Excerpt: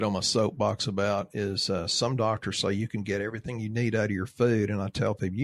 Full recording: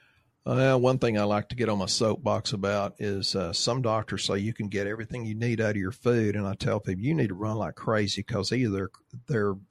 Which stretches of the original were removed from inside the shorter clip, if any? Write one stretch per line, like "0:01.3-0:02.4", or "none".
none